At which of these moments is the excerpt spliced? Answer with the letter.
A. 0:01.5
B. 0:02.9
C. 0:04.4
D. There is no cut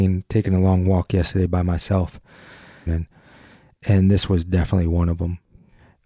B